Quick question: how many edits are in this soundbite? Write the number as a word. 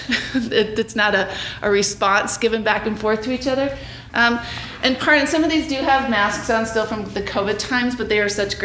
one